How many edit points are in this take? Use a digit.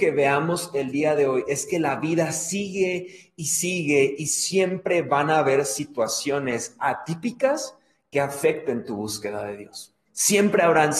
1